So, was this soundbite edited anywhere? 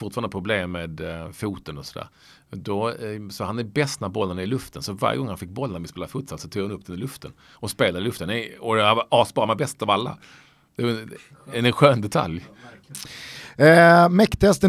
no; 0 cuts

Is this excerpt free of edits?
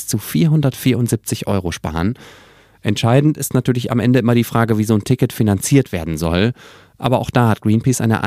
yes; 0 cuts

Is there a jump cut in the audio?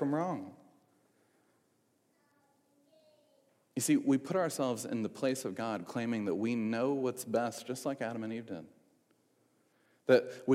no; 0 cuts

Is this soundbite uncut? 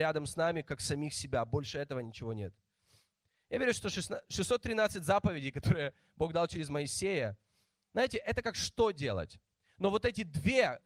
yes; 0 cuts

